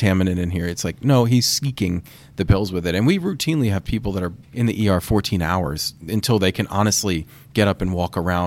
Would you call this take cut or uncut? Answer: cut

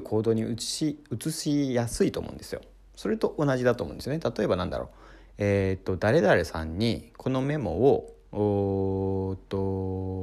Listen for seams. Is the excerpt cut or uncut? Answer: uncut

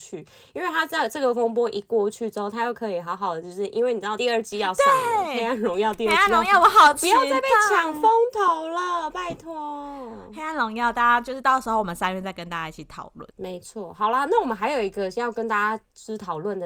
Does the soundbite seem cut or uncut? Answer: cut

